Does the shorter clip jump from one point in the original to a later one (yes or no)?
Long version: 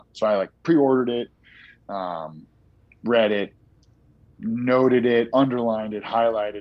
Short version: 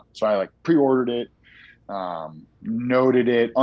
yes